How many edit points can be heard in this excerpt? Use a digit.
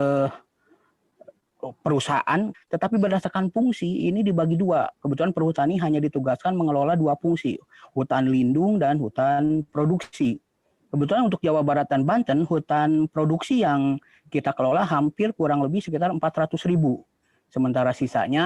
1